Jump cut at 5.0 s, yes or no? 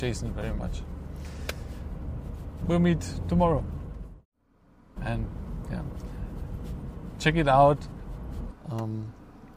yes